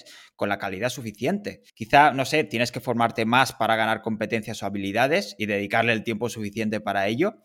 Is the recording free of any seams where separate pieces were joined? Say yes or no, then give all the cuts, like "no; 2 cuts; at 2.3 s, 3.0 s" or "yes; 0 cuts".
no; 1 cut; at 1.7 s